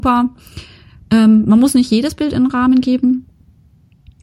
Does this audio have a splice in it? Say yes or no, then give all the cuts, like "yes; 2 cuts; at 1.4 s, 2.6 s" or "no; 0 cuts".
no; 0 cuts